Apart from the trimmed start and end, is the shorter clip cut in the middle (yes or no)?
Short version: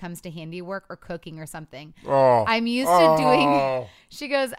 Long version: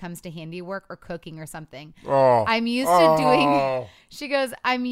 no